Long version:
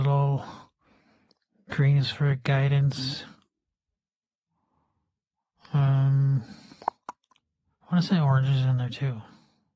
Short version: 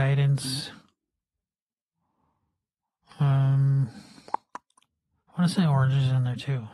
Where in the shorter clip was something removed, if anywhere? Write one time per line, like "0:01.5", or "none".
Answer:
none